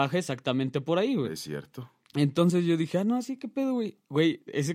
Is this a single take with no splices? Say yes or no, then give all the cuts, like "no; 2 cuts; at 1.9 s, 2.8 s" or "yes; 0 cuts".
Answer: yes; 0 cuts